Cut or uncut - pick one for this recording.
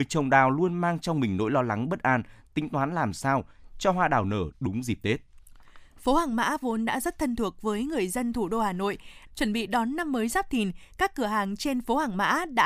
cut